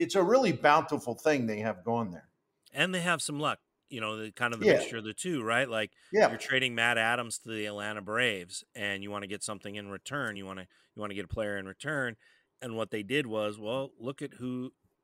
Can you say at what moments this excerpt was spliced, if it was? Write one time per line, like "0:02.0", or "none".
none